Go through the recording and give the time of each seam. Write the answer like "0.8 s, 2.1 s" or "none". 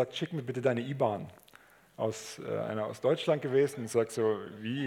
none